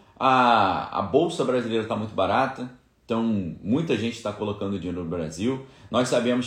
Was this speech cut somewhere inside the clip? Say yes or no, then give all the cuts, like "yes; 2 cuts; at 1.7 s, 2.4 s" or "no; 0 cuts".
no; 0 cuts